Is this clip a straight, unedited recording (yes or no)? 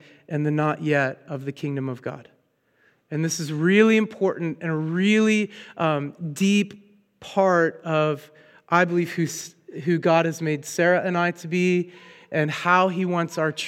yes